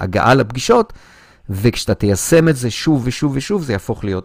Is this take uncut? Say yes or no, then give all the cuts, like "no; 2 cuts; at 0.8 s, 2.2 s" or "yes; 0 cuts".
no; 1 cut; at 3.0 s